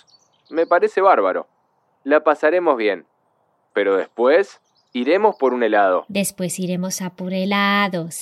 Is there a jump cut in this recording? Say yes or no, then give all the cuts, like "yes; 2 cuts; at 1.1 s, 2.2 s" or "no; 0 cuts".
no; 0 cuts